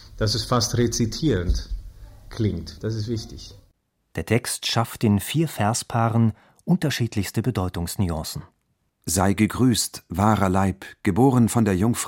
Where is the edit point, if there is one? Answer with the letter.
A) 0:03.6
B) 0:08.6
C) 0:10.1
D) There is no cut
D